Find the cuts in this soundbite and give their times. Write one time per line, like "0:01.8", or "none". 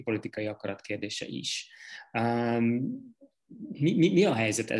none